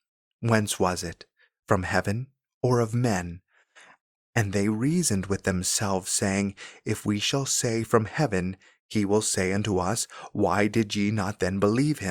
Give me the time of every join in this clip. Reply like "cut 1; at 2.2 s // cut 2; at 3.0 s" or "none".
none